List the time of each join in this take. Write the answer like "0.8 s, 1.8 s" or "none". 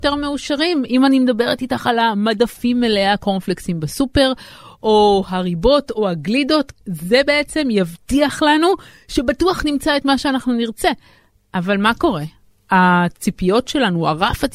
6.7 s